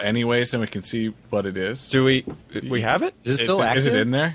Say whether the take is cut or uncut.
uncut